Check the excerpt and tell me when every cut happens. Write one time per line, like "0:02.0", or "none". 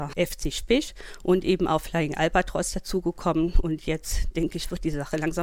none